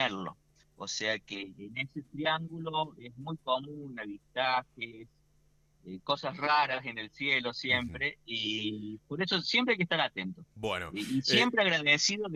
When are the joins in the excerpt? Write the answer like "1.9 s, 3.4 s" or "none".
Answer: 9.0 s